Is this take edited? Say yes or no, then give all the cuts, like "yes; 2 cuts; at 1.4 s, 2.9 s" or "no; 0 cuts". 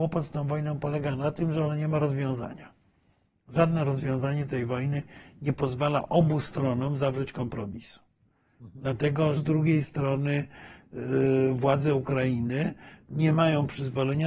yes; 1 cut; at 9.4 s